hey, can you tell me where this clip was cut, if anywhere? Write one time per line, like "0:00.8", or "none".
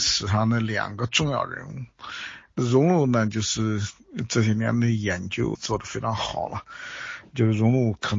0:02.5
0:05.5

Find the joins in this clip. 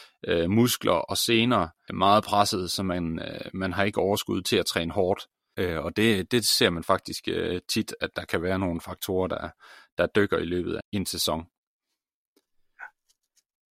0:01.9
0:05.5
0:10.8

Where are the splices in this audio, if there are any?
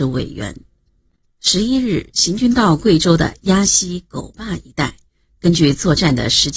none

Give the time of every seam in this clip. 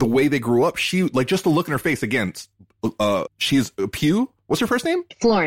0:03.3

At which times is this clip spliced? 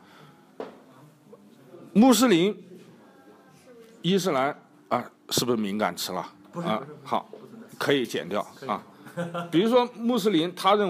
none

